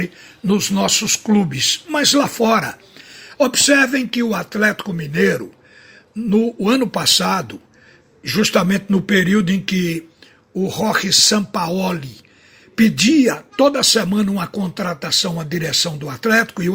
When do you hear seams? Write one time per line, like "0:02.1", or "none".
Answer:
0:03.3